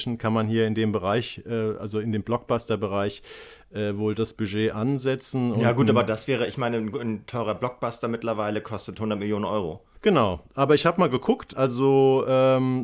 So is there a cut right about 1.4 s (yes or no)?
no